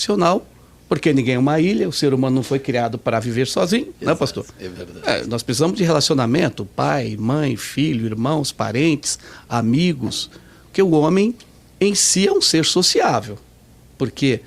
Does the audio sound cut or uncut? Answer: uncut